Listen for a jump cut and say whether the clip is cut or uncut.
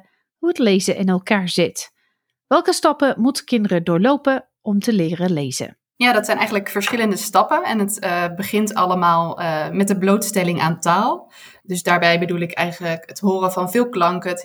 uncut